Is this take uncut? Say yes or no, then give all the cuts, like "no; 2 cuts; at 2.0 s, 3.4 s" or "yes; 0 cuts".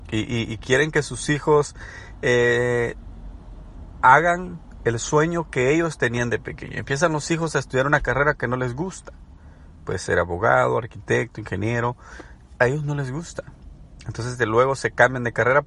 no; 1 cut; at 12.6 s